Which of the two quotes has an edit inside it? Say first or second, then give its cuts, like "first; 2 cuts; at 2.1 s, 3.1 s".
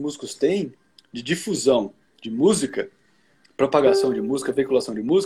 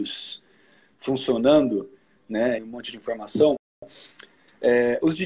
second; 1 cut; at 2.6 s